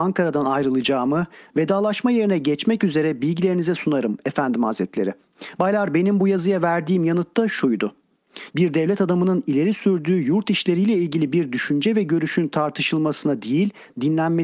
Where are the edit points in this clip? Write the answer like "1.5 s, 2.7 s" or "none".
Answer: 5.6 s, 8.5 s